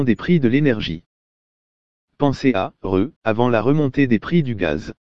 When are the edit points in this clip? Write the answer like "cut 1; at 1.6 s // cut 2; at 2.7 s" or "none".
cut 1; at 2.0 s // cut 2; at 3.2 s